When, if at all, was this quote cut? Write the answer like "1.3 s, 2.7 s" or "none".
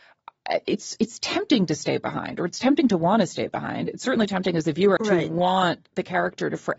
5.0 s